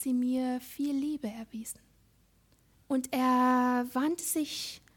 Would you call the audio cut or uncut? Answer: cut